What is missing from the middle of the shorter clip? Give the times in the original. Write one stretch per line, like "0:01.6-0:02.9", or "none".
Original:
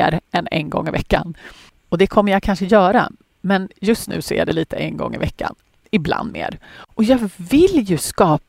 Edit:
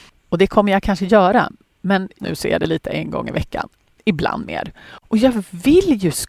0:03.8-0:04.1